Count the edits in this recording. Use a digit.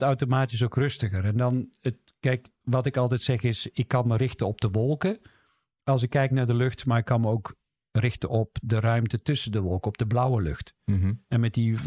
0